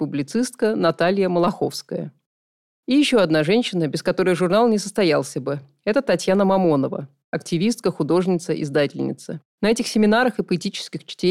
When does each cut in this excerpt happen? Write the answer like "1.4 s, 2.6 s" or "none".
9.5 s